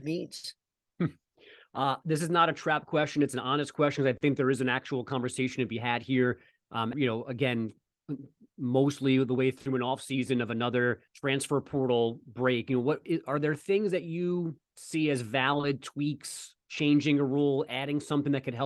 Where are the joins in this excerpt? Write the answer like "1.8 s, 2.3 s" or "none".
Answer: 6.9 s, 11.1 s